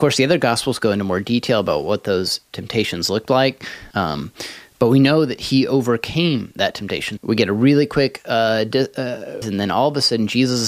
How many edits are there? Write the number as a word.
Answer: three